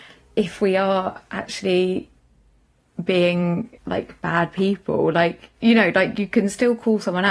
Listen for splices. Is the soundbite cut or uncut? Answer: cut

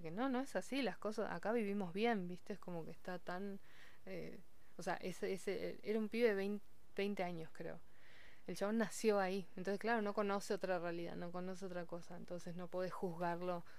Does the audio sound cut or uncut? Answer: uncut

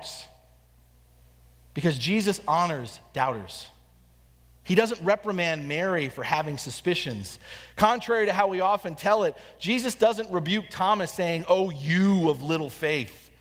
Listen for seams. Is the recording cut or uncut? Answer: uncut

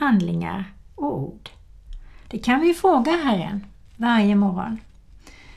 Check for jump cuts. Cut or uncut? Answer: cut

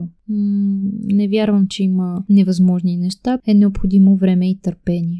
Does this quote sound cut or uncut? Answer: cut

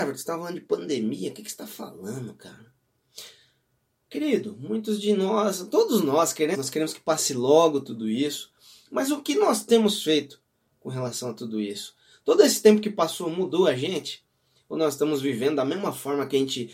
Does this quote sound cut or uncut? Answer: cut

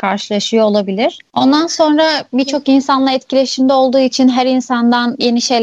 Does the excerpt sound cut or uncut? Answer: cut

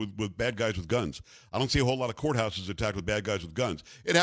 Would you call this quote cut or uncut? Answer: uncut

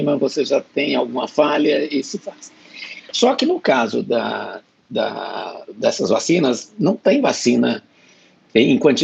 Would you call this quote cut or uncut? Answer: uncut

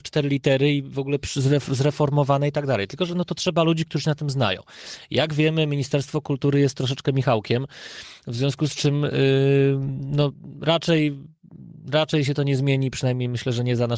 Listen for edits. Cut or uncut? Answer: uncut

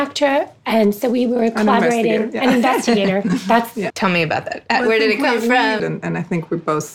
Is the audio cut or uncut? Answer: cut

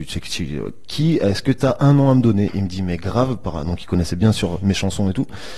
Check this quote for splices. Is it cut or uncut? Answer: uncut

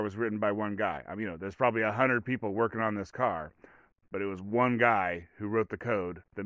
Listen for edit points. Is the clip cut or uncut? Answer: uncut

